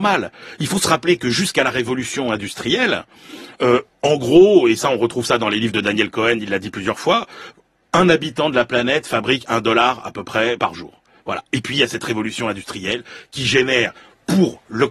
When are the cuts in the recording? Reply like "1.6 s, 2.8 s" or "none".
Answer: 10.6 s